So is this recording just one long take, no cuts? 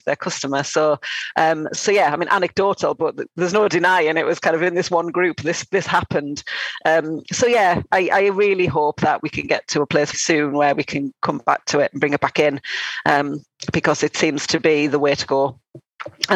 no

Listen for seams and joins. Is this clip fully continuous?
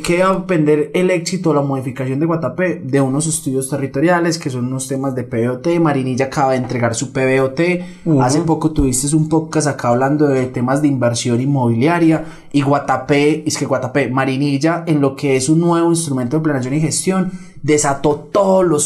yes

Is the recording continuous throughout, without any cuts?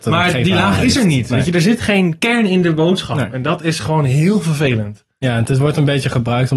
yes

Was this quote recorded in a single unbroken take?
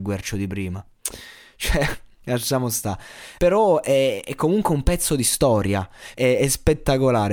no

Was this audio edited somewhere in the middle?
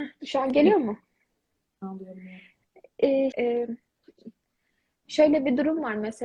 yes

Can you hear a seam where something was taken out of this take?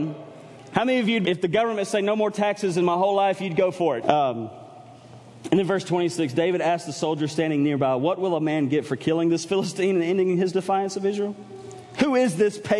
yes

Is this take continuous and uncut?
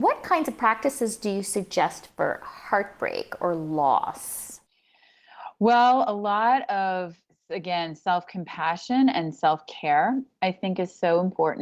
yes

